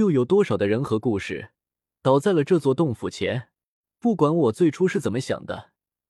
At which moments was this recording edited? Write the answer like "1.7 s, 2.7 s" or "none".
3.8 s